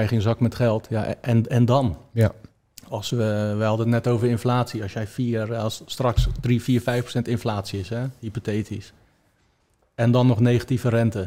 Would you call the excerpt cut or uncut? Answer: uncut